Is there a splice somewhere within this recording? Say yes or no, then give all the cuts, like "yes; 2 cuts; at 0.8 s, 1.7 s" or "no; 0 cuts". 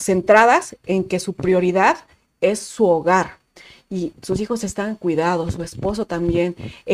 yes; 1 cut; at 4.1 s